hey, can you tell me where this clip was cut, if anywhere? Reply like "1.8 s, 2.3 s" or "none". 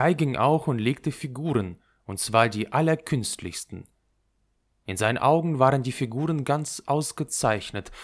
4.7 s